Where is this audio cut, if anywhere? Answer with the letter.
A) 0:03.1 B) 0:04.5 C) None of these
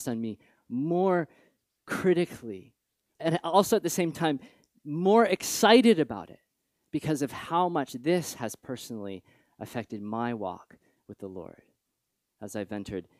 A